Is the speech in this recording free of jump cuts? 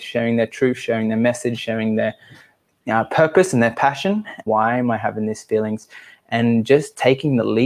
no; 1 cut; at 4.5 s

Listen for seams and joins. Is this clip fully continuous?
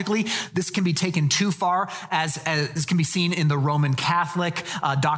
yes; 0 cuts

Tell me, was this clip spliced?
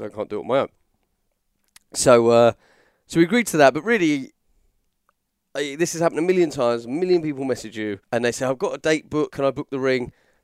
yes; 2 cuts; at 8.0 s, 9.3 s

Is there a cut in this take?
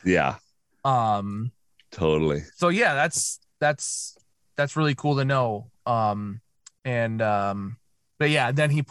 no; 0 cuts

